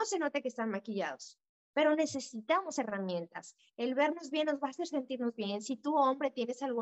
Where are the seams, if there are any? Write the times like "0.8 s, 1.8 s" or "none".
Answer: none